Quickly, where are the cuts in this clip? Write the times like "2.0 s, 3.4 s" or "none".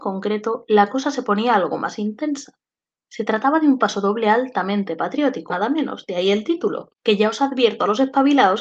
5.5 s, 6.9 s